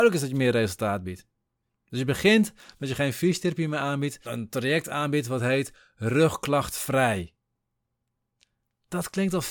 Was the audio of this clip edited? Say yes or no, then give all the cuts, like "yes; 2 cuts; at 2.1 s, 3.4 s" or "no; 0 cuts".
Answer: yes; 1 cut; at 4.2 s